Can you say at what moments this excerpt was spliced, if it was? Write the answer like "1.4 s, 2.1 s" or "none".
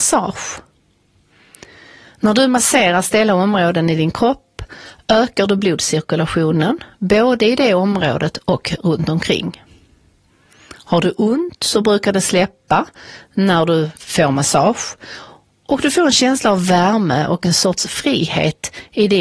none